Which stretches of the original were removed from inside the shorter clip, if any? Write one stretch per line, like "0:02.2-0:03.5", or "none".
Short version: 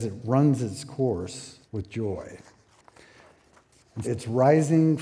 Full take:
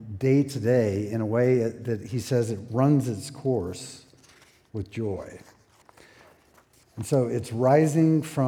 0:04.1-0:04.6
0:07.0-0:07.3